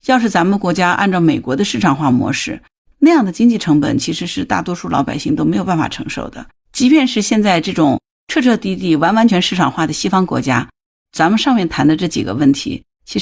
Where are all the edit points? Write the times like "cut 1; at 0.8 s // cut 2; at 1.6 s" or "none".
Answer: cut 1; at 6.6 s // cut 2; at 9.3 s